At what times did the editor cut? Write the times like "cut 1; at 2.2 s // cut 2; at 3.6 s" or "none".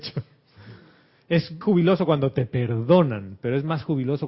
cut 1; at 1.6 s